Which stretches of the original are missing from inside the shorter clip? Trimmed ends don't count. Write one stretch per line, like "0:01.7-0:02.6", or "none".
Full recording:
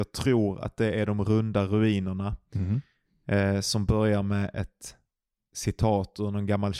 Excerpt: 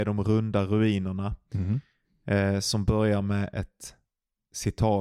none